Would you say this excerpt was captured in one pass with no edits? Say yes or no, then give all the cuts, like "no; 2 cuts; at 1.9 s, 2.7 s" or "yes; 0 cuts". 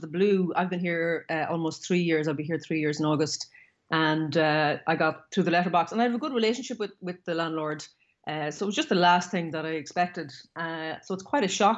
yes; 0 cuts